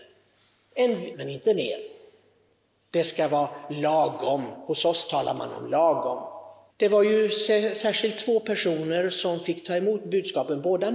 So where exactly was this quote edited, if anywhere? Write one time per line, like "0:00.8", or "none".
0:01.1
0:06.7